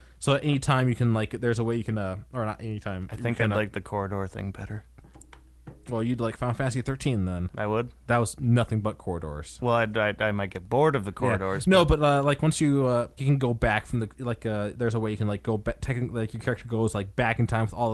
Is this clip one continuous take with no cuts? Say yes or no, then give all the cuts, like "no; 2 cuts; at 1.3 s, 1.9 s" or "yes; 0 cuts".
no; 1 cut; at 13.2 s